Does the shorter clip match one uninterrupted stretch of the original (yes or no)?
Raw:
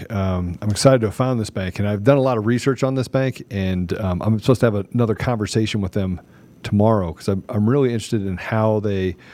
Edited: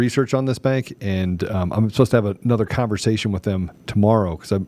no